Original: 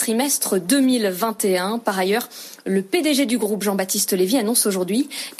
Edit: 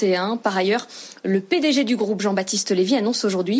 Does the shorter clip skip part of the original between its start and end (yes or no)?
no